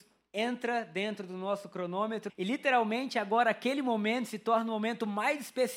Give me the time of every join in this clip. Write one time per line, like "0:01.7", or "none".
0:02.3